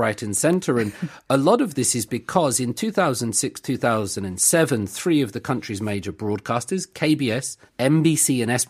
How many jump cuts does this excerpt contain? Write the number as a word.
one